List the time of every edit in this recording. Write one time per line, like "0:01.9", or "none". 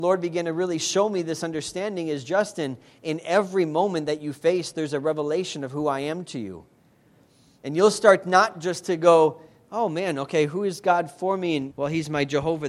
0:11.7

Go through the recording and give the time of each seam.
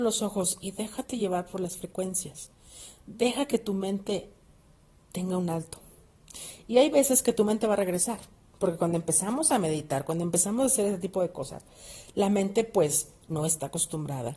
none

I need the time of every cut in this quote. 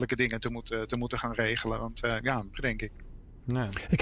0:02.5

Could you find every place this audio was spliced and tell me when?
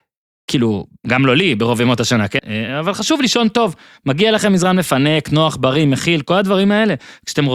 0:02.4

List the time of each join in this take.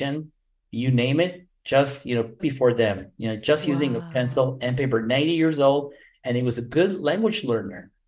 0:02.4

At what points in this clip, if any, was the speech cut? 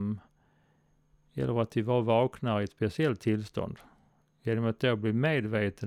none

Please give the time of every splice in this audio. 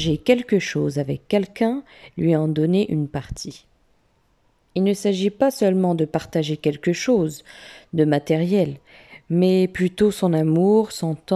none

